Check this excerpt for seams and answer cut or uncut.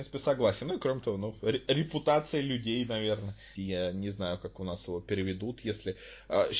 cut